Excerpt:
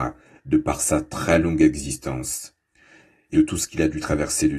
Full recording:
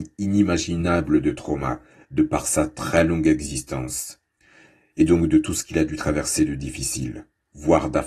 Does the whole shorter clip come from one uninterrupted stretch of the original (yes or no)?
no